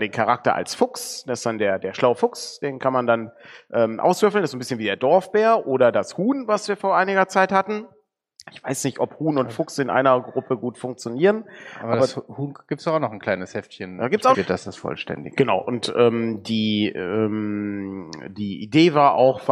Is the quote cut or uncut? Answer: cut